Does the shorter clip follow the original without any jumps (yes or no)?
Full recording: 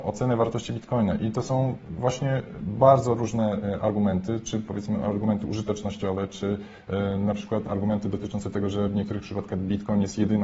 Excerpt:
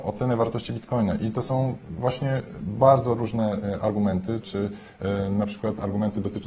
no